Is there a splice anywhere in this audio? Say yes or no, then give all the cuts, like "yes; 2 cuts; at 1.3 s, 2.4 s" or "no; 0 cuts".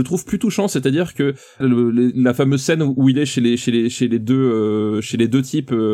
yes; 1 cut; at 1.6 s